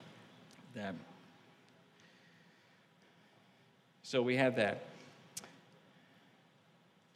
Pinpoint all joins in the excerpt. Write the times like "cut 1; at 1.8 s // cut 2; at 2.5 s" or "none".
none